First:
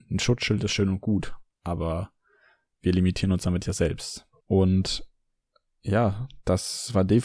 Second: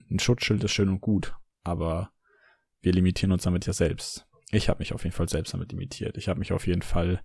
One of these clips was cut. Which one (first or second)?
first